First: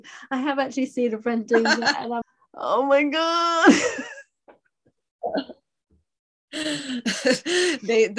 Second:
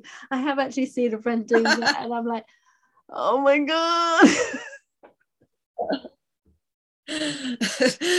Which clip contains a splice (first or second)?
first